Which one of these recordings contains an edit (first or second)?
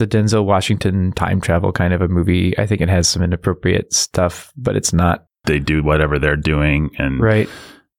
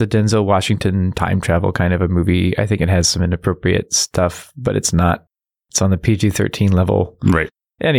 first